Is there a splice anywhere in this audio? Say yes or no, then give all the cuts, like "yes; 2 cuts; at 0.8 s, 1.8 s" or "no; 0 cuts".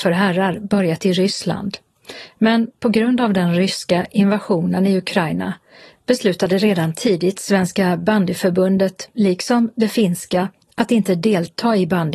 no; 0 cuts